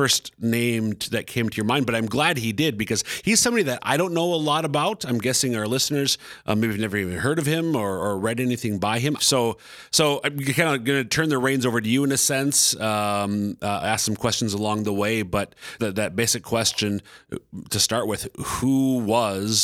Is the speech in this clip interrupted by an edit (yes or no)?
yes